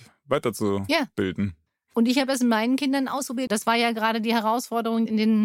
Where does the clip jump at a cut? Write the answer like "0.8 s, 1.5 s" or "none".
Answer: 3.5 s